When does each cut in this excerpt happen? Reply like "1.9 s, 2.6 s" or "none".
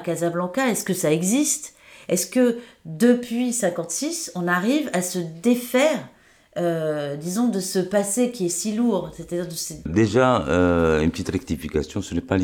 9.9 s